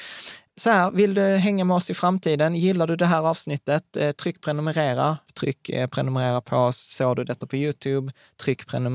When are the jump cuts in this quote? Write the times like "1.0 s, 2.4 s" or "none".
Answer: 5.2 s